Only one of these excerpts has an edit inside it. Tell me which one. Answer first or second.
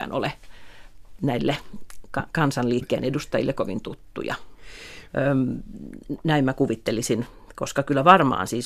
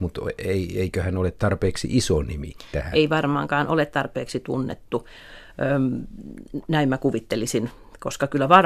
first